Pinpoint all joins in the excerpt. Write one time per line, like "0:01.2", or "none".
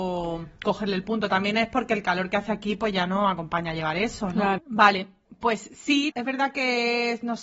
0:04.6
0:06.1